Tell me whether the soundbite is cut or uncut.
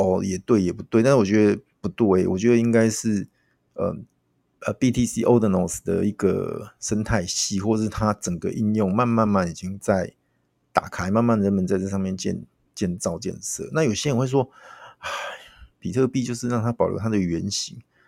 cut